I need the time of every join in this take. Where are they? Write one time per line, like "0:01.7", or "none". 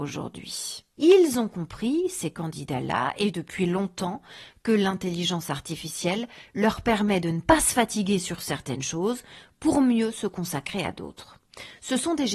0:01.0